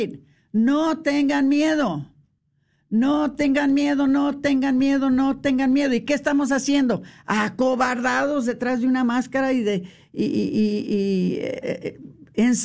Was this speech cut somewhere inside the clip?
yes; 1 cut; at 11.6 s

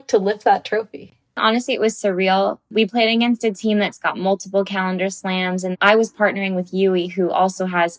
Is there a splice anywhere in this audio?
no; 0 cuts

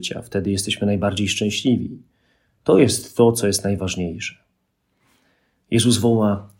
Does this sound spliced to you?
no; 0 cuts

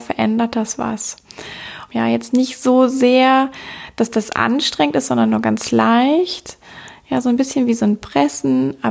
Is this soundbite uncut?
no; 1 cut; at 1.9 s

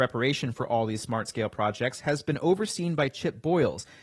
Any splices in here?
no; 0 cuts

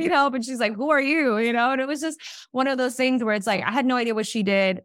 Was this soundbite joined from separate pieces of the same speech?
no; 0 cuts

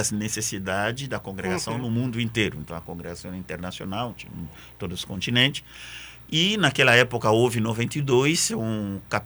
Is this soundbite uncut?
yes; 0 cuts

